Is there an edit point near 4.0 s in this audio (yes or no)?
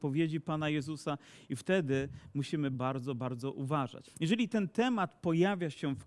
yes